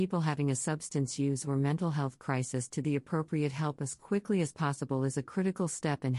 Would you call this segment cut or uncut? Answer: uncut